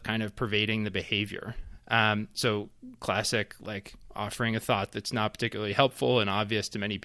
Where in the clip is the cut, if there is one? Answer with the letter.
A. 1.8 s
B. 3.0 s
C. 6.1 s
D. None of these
A